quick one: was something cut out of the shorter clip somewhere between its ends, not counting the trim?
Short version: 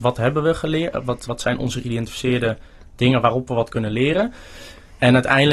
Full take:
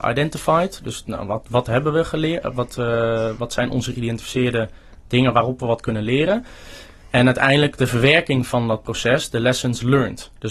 yes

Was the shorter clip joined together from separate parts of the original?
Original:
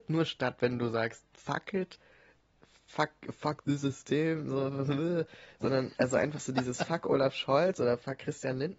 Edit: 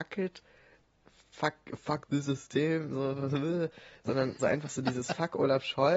yes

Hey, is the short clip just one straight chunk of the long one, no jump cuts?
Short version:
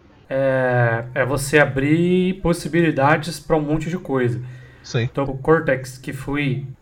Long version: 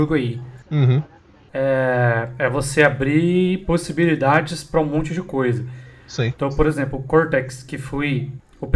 no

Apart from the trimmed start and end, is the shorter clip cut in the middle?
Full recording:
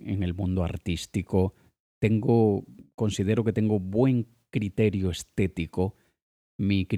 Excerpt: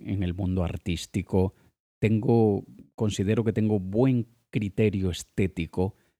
no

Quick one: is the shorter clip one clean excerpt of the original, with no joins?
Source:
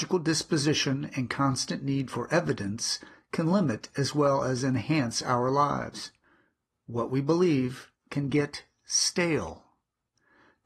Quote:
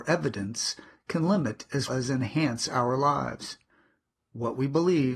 no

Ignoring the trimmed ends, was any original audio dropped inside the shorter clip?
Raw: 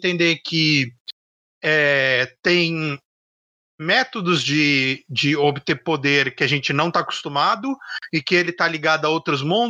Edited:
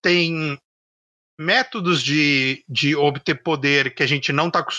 no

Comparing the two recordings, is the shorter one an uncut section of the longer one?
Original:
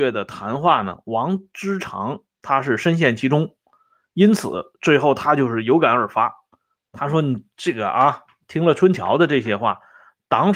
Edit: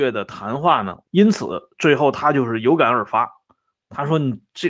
no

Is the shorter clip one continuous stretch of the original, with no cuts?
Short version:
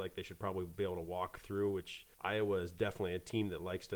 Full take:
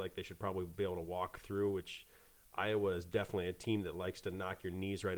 no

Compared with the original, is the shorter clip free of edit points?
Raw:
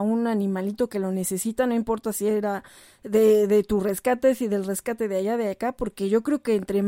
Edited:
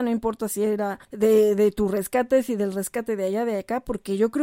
no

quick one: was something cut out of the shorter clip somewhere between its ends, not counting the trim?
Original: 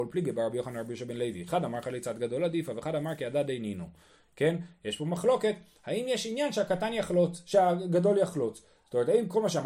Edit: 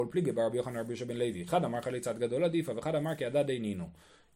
no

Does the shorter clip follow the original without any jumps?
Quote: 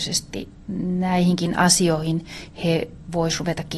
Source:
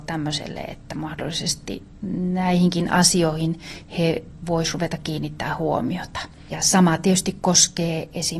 yes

